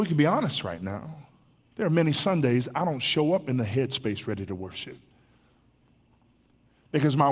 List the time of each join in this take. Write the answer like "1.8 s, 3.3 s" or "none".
1.6 s